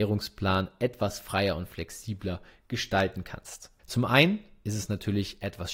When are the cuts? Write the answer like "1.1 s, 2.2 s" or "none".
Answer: 3.8 s